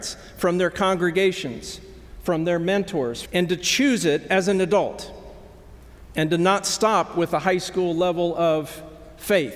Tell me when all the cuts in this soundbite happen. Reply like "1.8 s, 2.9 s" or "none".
3.2 s